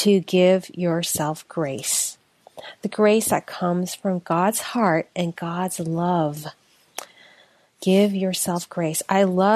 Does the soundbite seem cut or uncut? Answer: uncut